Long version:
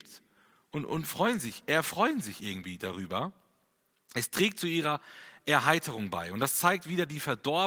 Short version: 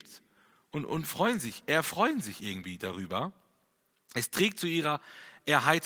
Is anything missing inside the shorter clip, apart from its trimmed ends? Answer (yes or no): no